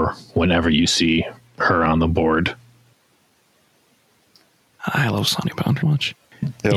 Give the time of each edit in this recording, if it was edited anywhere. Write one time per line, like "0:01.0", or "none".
0:04.8
0:05.8